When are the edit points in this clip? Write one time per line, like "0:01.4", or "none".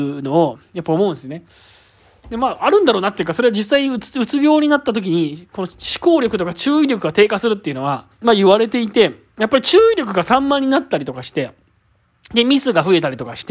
0:08.1